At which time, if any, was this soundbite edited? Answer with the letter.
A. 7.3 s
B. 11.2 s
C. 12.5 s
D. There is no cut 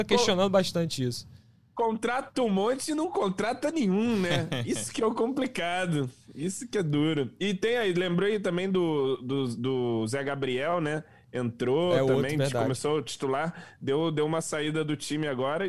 D